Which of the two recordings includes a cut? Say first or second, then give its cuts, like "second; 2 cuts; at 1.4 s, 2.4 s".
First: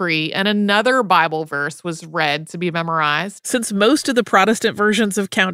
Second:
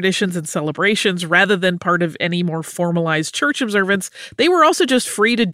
first; 1 cut; at 3.4 s